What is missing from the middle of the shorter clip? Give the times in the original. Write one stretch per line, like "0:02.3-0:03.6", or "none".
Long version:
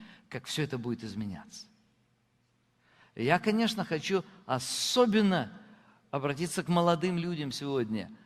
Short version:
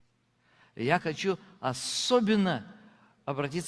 0:03.4-0:03.9